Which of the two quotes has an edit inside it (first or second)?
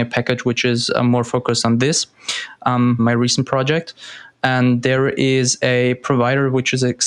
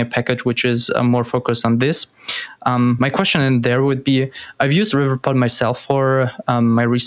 first